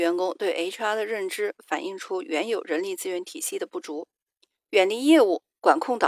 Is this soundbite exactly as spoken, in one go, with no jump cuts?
yes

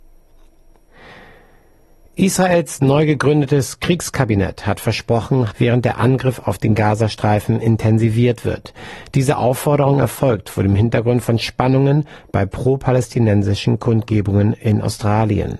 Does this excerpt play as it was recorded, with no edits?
no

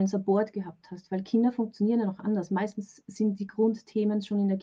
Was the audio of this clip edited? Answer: no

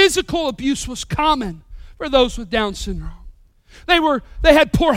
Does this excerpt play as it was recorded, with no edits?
yes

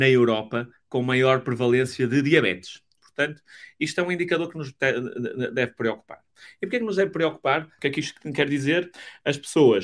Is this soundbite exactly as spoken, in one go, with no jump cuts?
no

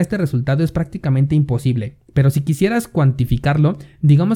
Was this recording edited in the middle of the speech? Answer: no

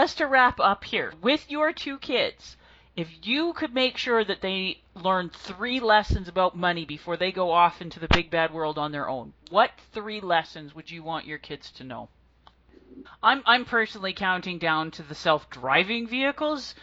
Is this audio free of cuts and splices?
no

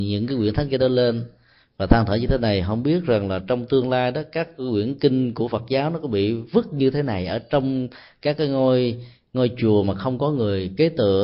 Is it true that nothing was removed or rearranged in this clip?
yes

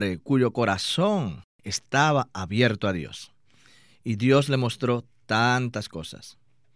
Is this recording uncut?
yes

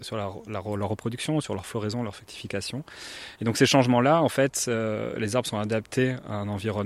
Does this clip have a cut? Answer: no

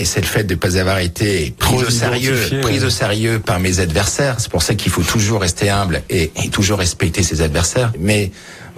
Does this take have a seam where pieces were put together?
no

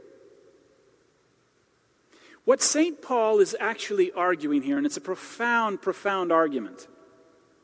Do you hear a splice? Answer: no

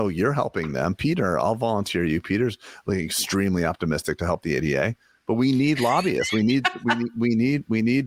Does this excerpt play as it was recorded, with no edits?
yes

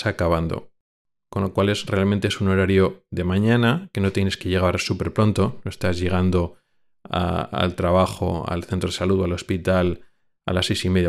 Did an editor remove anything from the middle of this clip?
no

